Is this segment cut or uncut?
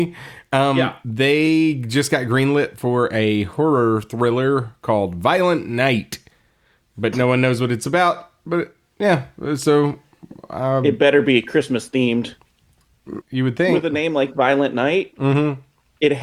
cut